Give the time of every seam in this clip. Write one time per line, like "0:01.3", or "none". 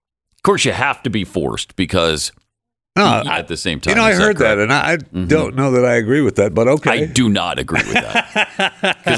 0:03.3